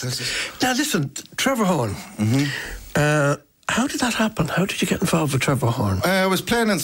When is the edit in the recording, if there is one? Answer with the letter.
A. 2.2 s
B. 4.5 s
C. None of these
C